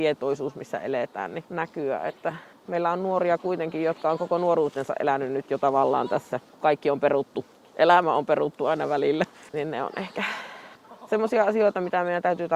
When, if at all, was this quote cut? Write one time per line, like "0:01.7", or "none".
0:09.5